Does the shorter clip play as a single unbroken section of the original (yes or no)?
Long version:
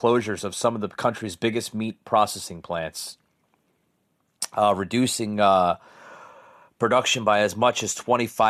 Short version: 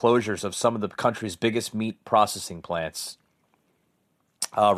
yes